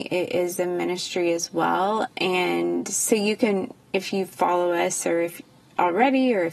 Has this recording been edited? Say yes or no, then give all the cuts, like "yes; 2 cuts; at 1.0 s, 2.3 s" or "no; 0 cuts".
yes; 1 cut; at 2.1 s